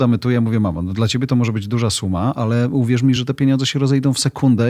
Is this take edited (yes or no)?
no